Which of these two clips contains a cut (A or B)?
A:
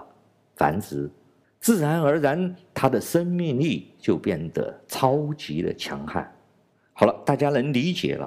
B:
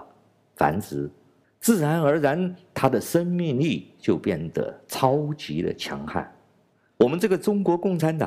B